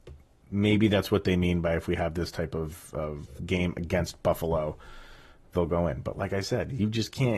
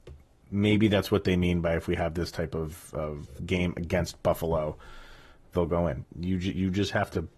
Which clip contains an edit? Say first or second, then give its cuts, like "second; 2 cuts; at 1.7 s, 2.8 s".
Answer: second; 1 cut; at 6.0 s